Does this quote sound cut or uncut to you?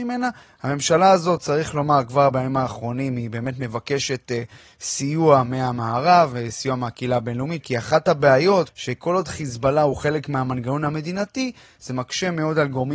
cut